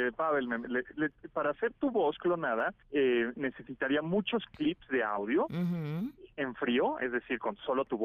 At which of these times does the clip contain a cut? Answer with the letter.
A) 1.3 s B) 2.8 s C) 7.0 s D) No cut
B